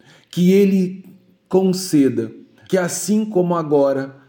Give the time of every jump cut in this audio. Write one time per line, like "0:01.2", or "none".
0:02.7